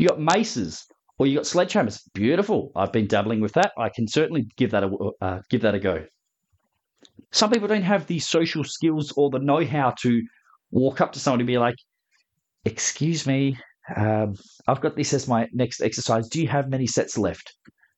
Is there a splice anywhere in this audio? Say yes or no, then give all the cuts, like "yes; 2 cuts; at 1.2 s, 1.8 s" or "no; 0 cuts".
yes; 1 cut; at 7.2 s